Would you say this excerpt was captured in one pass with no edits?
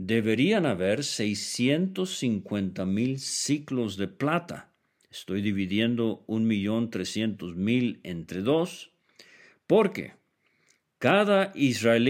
yes; 0 cuts

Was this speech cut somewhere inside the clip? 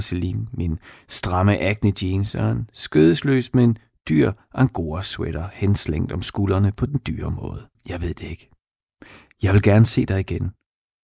yes; 1 cut; at 7.7 s

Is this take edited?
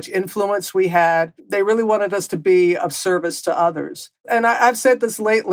no; 0 cuts

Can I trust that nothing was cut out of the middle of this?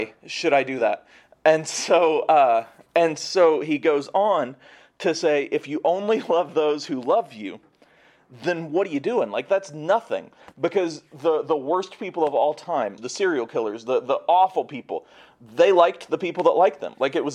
no; 1 cut; at 13.0 s

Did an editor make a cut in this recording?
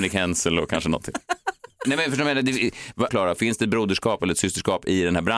yes; 2 cuts; at 1.8 s, 3.1 s

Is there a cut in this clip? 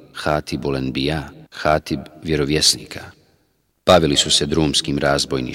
yes; 2 cuts; at 1.5 s, 3.7 s

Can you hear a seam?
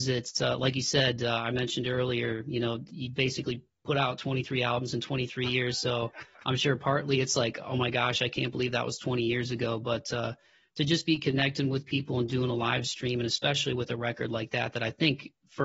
no; 0 cuts

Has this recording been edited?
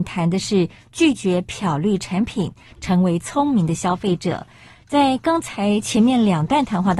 no; 0 cuts

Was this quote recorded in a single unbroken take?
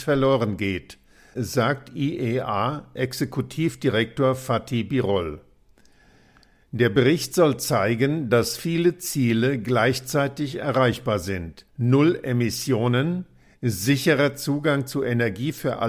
no; 1 cut; at 11.7 s

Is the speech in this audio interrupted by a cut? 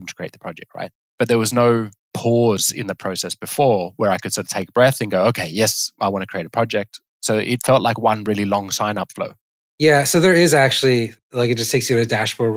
yes; 1 cut; at 2.1 s

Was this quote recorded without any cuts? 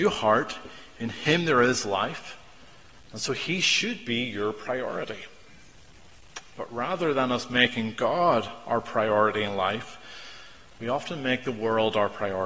yes; 0 cuts

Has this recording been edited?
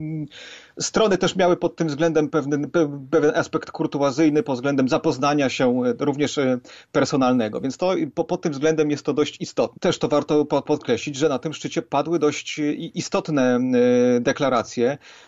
yes; 2 cuts; at 2.3 s, 9.8 s

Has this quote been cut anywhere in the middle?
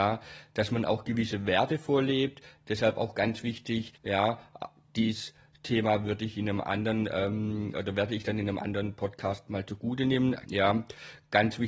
yes; 2 cuts; at 4.0 s, 10.5 s

